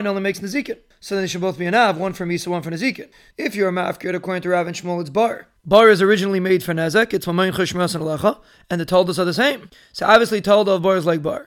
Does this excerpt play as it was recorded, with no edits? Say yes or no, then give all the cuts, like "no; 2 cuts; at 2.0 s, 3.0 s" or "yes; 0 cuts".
no; 2 cuts; at 3.3 s, 5.6 s